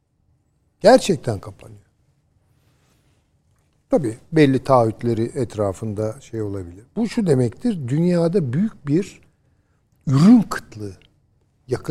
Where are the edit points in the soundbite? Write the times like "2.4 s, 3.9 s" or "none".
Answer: none